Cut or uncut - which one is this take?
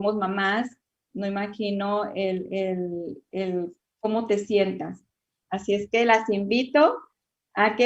cut